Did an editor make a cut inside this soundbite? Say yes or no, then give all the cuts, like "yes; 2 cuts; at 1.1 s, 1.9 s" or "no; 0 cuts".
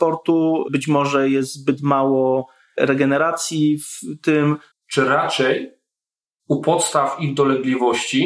yes; 1 cut; at 4.7 s